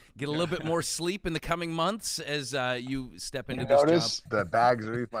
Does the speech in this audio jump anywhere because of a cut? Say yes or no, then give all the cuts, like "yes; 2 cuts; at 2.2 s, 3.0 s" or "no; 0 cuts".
yes; 1 cut; at 4.3 s